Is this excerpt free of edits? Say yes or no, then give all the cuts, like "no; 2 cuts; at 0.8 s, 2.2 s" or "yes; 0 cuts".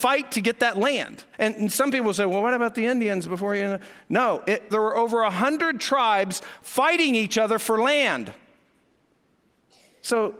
no; 2 cuts; at 1.3 s, 4.7 s